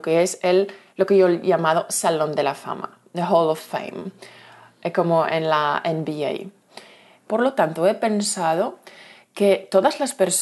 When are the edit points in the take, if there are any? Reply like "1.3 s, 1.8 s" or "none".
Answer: 7.3 s

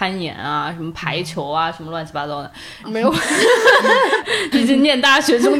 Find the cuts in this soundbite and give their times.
2.8 s, 4.5 s

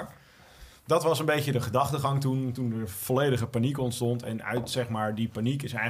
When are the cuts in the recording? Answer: none

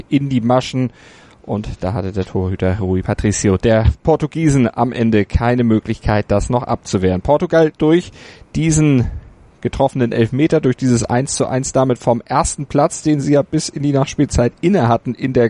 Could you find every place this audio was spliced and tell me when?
none

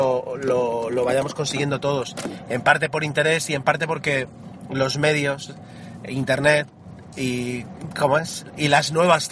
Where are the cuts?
none

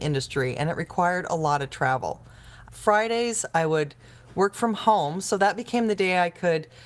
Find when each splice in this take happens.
2.6 s

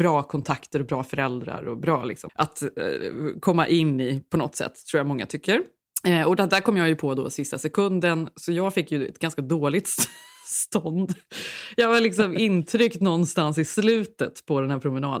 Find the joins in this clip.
2.3 s

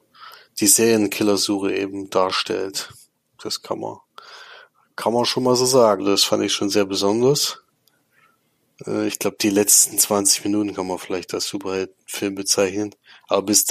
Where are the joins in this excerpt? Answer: 6.0 s

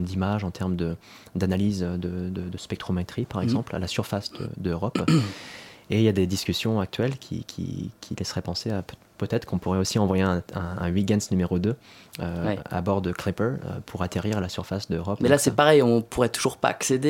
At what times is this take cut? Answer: none

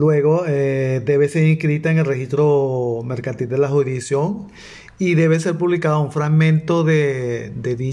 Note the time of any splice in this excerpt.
none

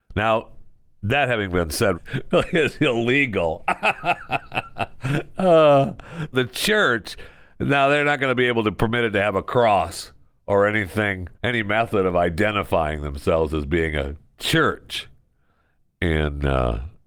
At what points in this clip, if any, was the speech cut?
1.9 s, 6.3 s, 11.3 s

